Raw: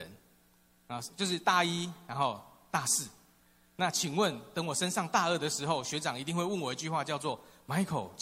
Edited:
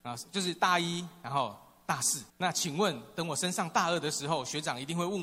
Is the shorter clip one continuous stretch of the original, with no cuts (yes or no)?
no